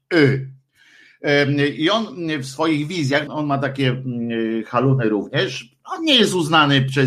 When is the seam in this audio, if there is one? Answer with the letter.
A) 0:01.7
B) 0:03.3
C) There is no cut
B